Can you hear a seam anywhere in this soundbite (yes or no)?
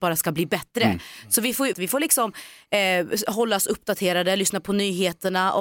yes